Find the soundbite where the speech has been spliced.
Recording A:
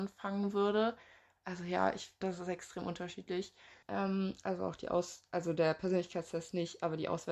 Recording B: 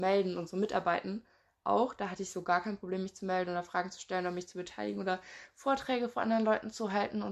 A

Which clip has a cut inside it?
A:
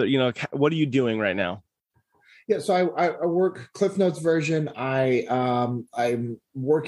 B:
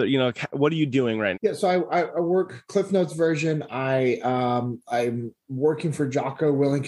B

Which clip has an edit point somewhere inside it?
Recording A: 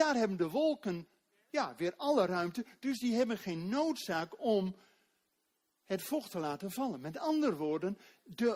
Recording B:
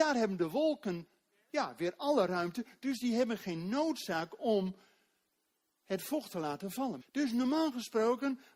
B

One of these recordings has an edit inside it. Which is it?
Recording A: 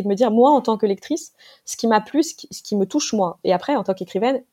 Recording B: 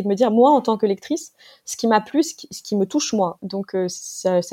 B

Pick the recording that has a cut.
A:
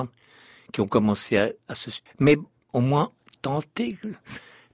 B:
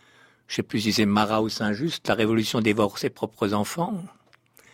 A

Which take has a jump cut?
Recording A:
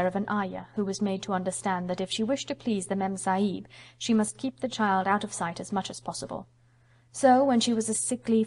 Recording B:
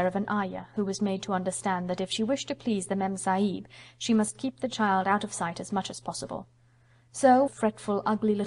B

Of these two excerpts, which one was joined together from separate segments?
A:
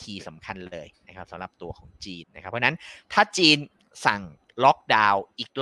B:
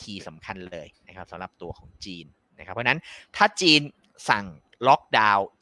A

